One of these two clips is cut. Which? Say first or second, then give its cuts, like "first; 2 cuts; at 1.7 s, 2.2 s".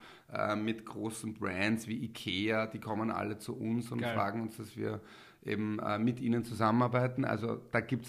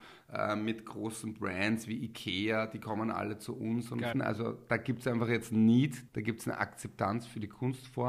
second; 2 cuts; at 4.1 s, 6.1 s